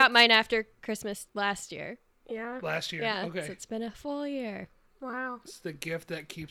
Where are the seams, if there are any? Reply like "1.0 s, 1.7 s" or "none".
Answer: 1.3 s